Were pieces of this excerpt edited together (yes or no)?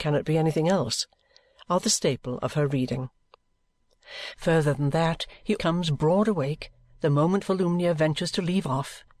yes